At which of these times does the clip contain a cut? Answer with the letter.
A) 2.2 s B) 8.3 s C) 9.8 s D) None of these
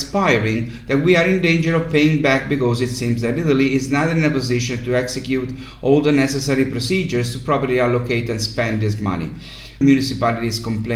C